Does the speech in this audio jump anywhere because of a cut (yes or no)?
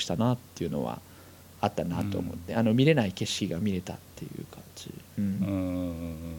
yes